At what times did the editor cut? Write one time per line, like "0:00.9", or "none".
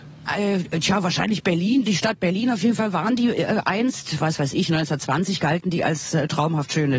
none